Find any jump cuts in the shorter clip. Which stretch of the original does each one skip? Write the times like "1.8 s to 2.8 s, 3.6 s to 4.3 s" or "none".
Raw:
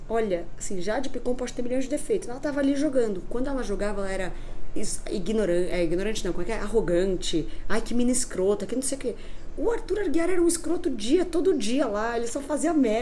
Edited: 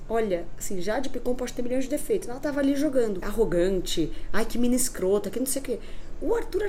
3.2 s to 6.6 s